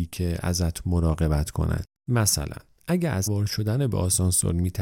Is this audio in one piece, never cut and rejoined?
no; 1 cut; at 3.3 s

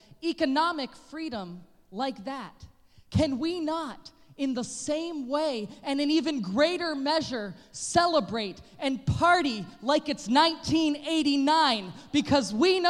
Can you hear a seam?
no; 0 cuts

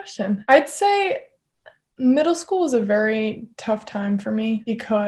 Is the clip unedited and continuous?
yes; 0 cuts

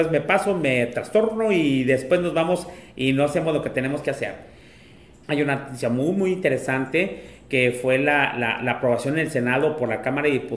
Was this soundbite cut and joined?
yes; 1 cut; at 5.2 s

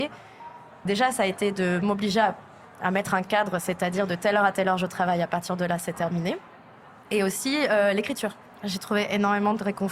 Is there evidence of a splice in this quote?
no; 0 cuts

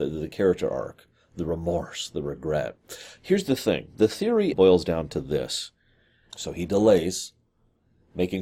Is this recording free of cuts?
no; 2 cuts; at 4.5 s, 6.3 s

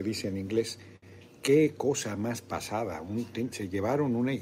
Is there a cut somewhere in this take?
no; 0 cuts

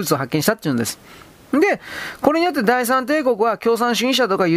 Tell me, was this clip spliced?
no; 0 cuts

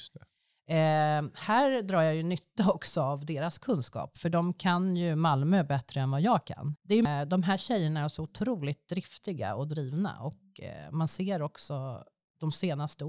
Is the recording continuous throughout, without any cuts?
no; 1 cut; at 6.8 s

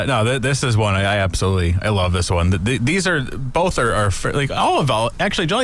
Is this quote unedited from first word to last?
yes; 0 cuts

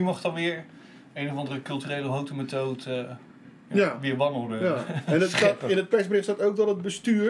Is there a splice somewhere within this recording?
no; 0 cuts

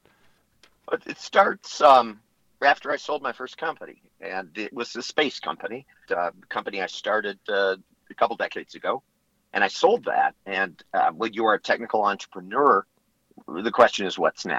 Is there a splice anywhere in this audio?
yes; 1 cut; at 6.1 s

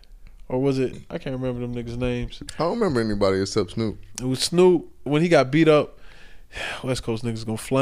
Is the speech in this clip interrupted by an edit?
yes; 2 cuts; at 2.5 s, 5.1 s

